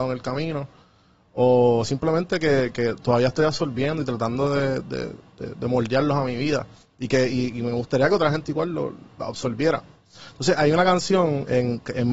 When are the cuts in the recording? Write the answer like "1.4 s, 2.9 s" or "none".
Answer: none